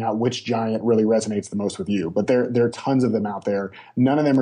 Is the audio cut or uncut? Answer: uncut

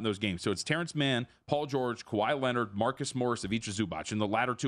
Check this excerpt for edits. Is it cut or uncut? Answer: uncut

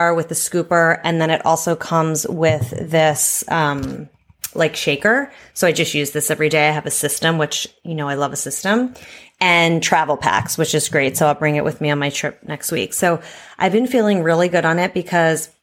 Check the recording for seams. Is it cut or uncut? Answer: uncut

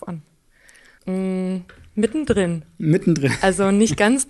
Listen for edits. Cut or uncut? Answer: cut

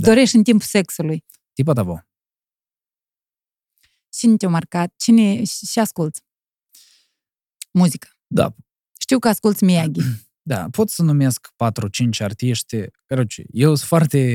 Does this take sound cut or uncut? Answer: uncut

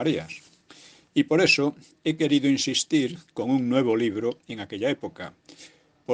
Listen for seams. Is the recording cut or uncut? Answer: uncut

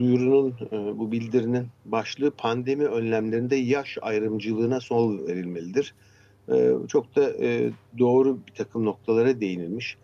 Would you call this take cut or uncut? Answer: uncut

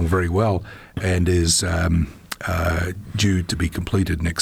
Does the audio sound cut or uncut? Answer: uncut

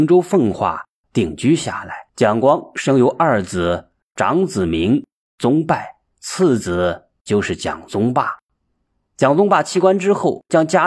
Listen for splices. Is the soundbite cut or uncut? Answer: cut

